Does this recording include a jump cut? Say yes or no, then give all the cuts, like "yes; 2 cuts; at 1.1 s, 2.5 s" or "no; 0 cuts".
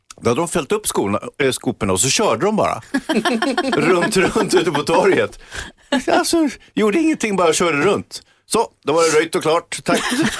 no; 0 cuts